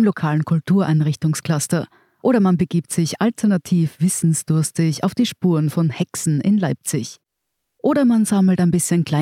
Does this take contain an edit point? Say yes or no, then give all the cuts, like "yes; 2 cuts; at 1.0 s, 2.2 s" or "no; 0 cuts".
no; 0 cuts